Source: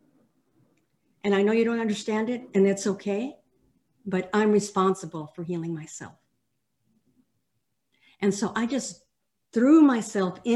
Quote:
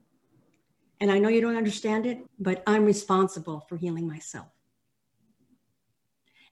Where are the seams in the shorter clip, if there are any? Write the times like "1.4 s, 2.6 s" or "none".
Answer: 2.3 s